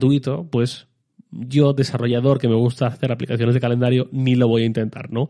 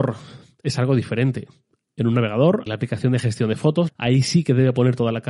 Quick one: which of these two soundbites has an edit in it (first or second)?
second